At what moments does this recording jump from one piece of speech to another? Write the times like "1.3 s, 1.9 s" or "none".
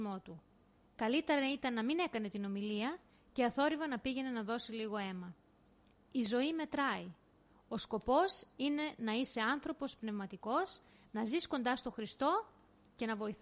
none